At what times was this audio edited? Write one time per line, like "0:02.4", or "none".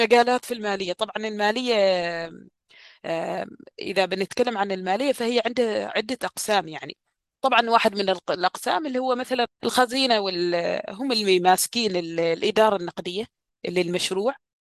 0:09.5